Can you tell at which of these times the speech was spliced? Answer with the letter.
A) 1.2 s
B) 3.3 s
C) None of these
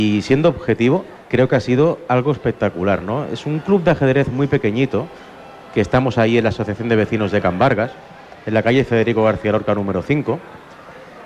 A